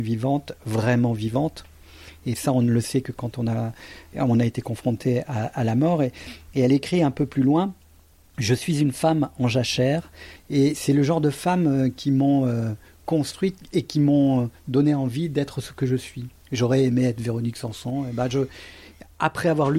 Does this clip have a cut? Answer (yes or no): yes